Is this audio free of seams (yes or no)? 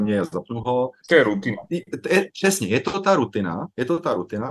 no